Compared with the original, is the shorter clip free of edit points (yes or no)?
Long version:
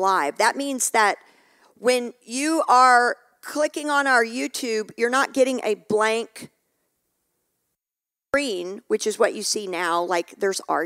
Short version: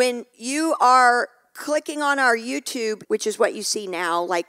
no